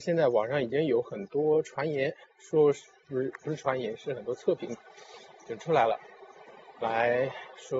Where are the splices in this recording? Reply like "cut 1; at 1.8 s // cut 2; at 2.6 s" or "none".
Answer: none

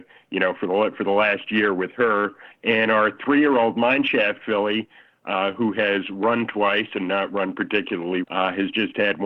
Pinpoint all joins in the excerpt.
cut 1; at 2.5 s // cut 2; at 8.2 s

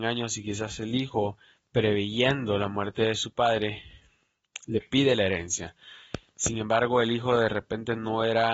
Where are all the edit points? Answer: none

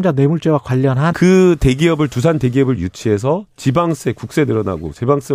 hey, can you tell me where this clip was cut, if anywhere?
cut 1; at 1.1 s

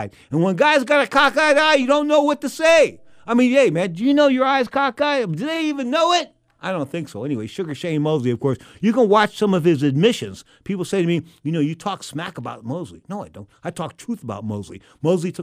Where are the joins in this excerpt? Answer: none

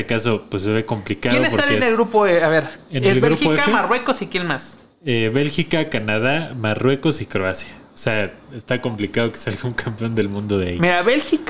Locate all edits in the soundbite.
none

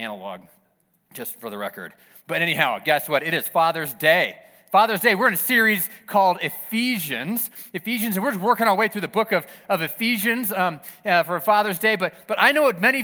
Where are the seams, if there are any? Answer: none

